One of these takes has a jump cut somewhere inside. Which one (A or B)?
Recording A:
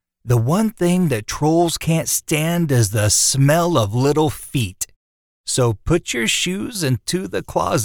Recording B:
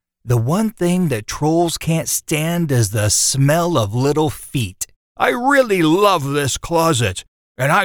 B